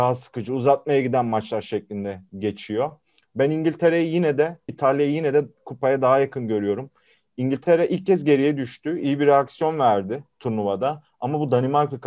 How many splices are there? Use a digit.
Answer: 1